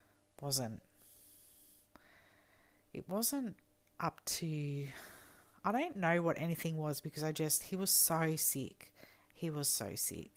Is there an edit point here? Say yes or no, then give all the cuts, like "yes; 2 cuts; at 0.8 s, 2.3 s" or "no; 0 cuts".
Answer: no; 0 cuts